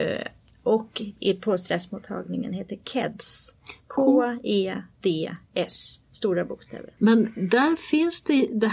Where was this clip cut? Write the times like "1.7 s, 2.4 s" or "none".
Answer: 7.0 s